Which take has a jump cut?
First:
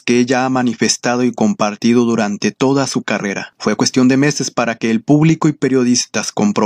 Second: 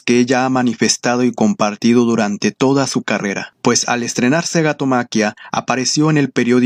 second; 1 cut; at 3.5 s

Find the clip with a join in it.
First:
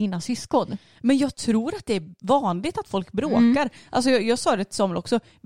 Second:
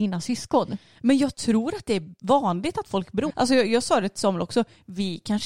second; 1 cut; at 3.3 s

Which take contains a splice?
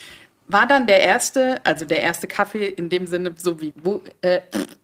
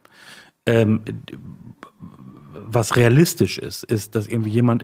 first; 1 cut; at 3.7 s

